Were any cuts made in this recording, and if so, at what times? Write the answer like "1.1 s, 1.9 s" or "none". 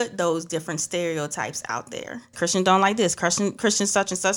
2.3 s

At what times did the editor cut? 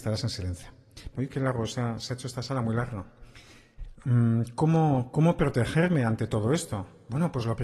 1.1 s

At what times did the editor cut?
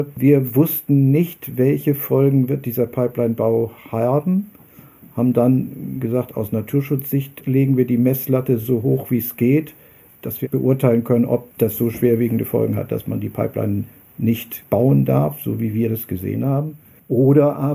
none

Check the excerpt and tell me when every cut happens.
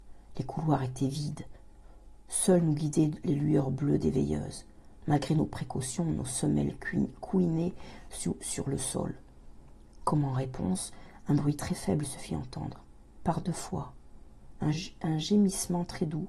14.7 s

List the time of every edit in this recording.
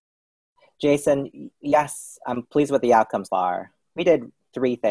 3.2 s

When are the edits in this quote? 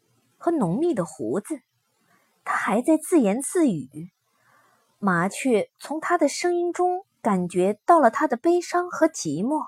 none

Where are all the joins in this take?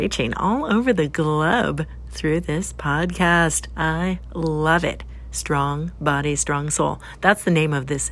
none

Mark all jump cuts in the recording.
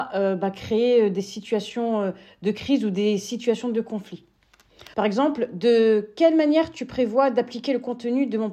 4.9 s

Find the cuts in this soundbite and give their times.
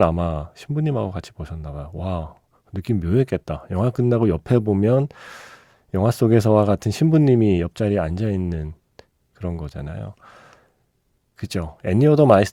11.4 s

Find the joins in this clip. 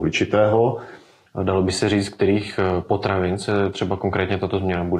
1.3 s

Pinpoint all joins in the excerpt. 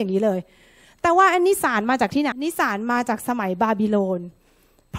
2.3 s

